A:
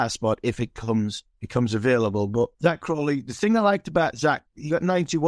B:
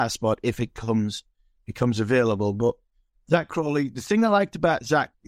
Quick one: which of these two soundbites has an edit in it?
A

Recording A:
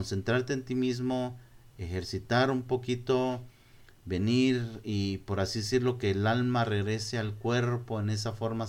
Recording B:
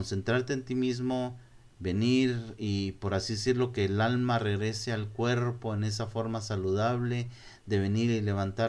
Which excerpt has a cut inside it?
B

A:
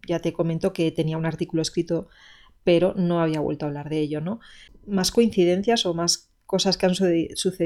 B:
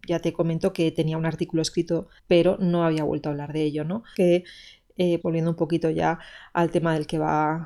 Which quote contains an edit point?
B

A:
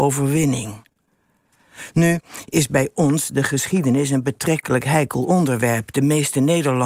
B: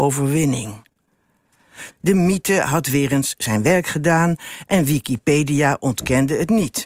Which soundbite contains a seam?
B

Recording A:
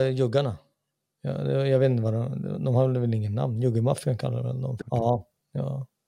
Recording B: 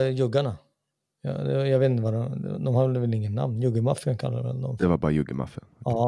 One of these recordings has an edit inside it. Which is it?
A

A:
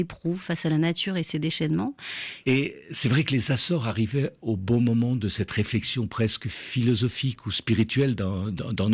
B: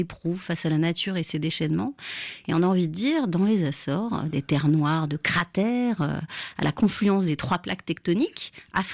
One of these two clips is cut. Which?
A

